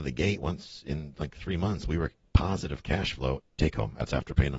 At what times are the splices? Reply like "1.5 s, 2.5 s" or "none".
3.4 s